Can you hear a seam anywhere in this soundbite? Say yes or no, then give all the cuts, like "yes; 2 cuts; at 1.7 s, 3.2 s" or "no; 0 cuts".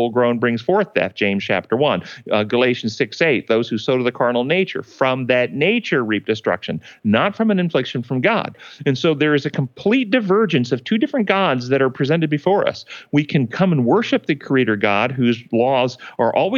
no; 0 cuts